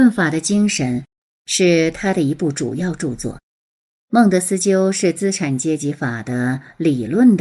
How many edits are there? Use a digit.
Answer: 0